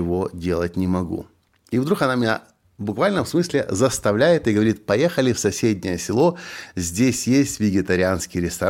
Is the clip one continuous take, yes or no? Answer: yes